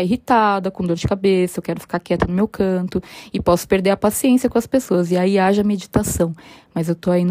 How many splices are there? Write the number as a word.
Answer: zero